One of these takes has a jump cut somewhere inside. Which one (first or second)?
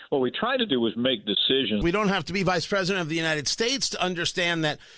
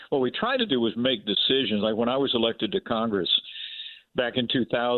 first